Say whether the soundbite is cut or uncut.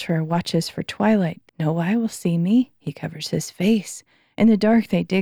cut